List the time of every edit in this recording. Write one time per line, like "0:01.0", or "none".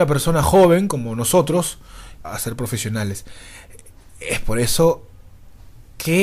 0:02.2